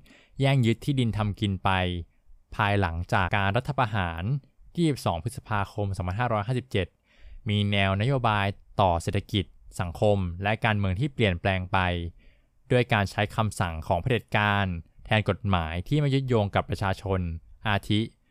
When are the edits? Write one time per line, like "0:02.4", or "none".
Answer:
0:03.3